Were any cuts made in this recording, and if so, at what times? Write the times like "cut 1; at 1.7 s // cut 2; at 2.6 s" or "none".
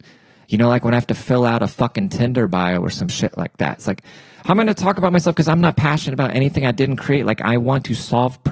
none